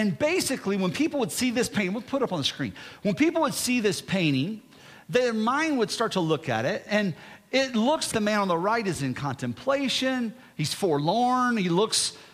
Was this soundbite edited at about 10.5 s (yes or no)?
no